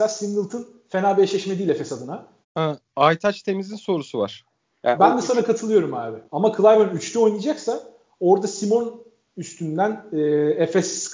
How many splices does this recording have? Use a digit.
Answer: 3